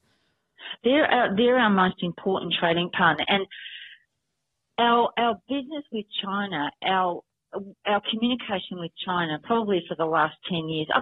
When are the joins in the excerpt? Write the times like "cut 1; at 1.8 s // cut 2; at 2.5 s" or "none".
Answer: none